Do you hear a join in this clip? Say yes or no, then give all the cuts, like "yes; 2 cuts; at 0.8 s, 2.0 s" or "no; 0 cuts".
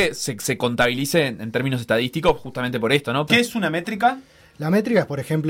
yes; 1 cut; at 3.3 s